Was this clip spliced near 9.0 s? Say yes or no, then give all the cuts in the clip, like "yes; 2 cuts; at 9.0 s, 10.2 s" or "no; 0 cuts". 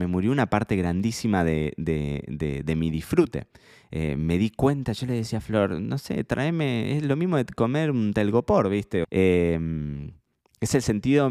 yes; 1 cut; at 9.0 s